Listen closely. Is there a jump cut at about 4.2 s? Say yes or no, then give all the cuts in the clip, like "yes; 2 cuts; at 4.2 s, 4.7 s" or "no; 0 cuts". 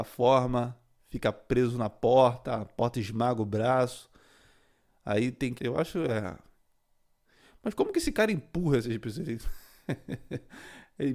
no; 1 cut; at 5.6 s